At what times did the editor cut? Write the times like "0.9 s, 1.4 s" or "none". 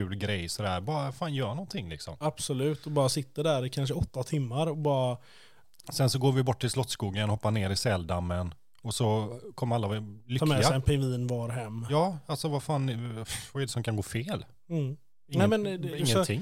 none